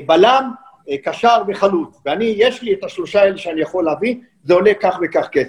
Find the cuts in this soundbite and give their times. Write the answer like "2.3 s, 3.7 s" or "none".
none